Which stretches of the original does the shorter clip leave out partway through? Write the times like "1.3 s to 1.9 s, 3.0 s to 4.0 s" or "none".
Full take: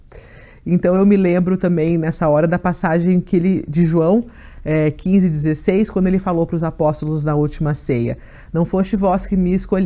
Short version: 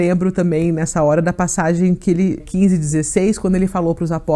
3.7 s to 4.9 s